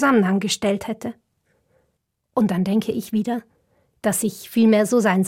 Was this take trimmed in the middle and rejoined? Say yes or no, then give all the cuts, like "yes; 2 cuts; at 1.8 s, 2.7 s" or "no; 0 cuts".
no; 0 cuts